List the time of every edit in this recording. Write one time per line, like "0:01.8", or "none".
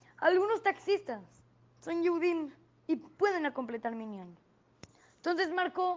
none